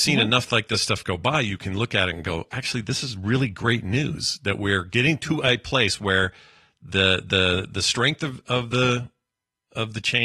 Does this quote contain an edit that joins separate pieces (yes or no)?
no